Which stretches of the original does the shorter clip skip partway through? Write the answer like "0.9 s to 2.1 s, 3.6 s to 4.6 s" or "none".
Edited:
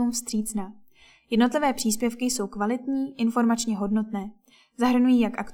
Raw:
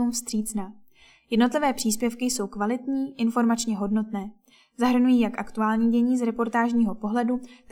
none